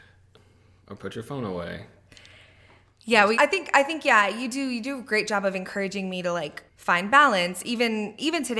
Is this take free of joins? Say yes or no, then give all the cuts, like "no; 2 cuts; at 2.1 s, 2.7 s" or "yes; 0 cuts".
no; 2 cuts; at 3.4 s, 6.7 s